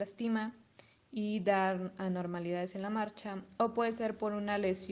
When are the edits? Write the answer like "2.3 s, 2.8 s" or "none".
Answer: none